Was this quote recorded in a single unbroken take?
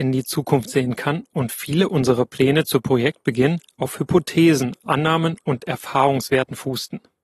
no; 1 cut; at 4.8 s

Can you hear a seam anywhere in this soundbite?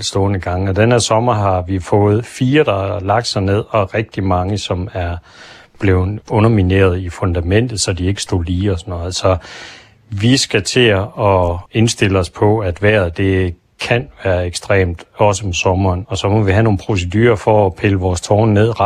no; 0 cuts

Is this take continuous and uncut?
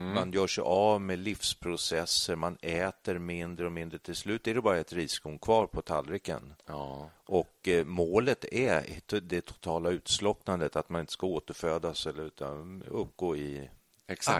yes; 0 cuts

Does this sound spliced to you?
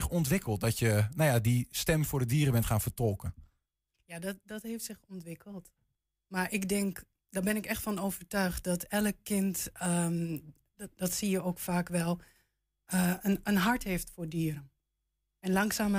no; 0 cuts

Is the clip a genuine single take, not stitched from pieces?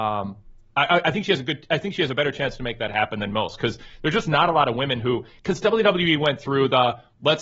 yes; 0 cuts

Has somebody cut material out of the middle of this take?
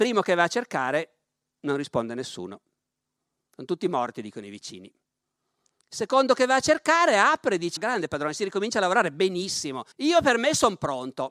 yes; 2 cuts; at 7.8 s, 9.9 s

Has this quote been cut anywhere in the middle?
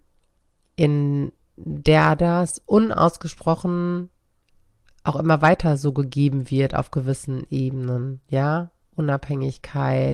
no; 0 cuts

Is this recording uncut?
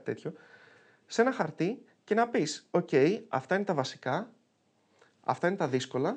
yes; 0 cuts

